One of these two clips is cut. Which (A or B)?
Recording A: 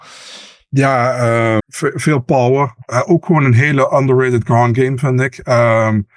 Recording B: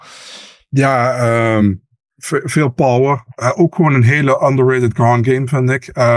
A